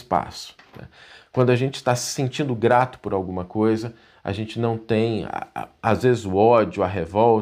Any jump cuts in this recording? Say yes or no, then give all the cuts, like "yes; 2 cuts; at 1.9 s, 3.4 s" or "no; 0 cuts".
no; 0 cuts